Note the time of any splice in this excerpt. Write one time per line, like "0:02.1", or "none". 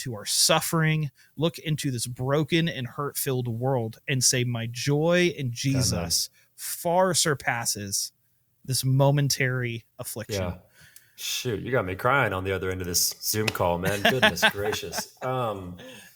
0:11.2